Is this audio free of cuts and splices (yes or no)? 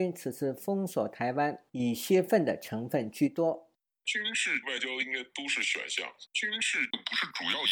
no